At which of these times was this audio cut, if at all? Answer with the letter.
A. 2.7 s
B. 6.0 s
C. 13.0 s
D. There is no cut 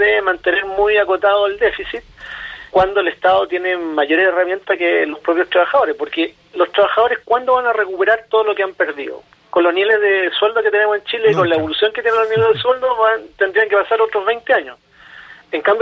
A